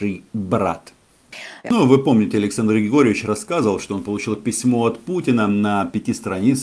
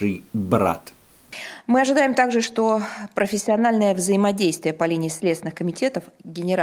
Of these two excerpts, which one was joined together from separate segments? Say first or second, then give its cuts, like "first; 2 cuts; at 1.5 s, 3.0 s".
first; 1 cut; at 1.6 s